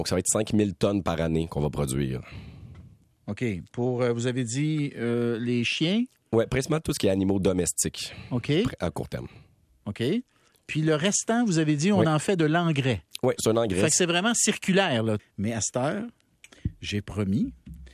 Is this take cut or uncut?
cut